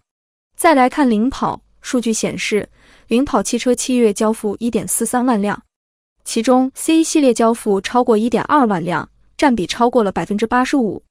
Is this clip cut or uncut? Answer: uncut